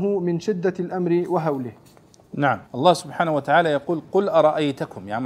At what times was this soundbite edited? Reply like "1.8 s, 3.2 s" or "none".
2.7 s

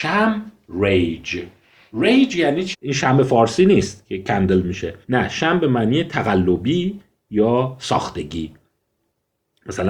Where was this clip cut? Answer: 2.7 s, 5.0 s

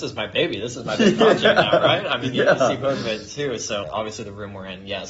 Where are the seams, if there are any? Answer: 3.8 s

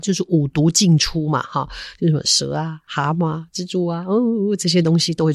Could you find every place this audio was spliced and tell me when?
none

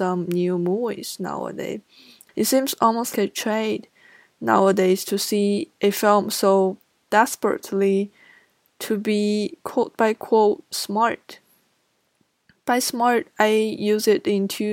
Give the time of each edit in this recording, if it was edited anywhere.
3.1 s

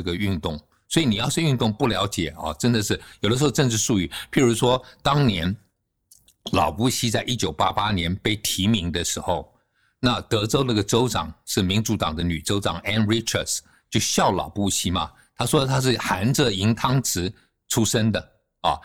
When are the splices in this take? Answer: none

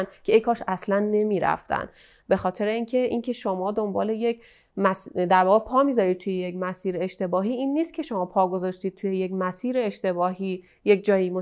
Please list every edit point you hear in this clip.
none

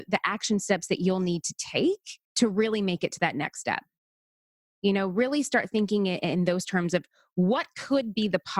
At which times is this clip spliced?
2.2 s, 4.8 s

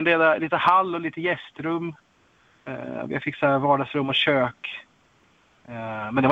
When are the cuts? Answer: none

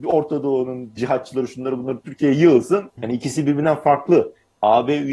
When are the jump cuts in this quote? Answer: 1.0 s, 3.0 s

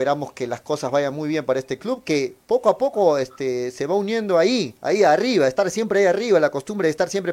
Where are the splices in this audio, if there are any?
none

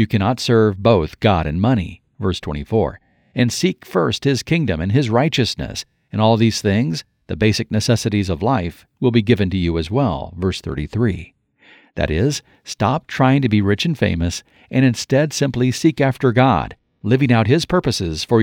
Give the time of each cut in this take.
none

